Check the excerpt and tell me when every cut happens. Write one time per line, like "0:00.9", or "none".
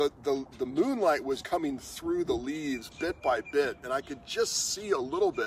0:01.4